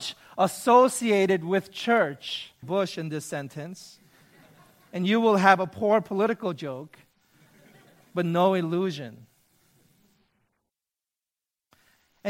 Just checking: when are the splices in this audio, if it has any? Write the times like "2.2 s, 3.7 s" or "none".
2.6 s